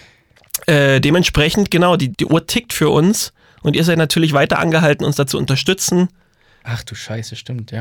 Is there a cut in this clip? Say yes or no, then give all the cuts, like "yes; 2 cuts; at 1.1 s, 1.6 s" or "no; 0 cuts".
yes; 2 cuts; at 2.1 s, 6.6 s